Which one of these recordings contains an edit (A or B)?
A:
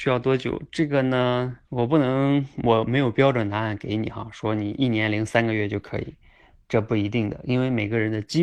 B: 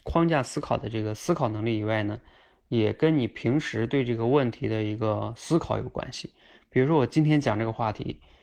A